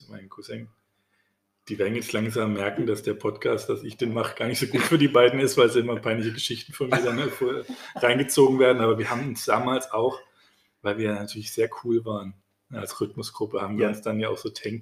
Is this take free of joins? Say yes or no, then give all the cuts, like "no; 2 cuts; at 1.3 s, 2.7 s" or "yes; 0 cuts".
yes; 0 cuts